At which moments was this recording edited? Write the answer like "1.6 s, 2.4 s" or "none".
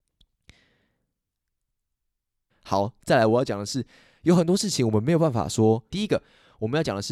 2.5 s, 5.9 s